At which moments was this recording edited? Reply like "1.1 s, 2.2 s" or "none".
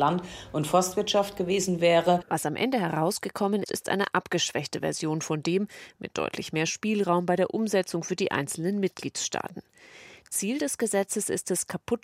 3.6 s, 6.0 s